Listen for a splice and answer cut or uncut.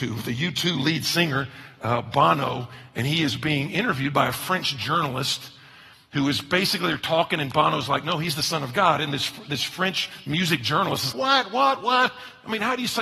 cut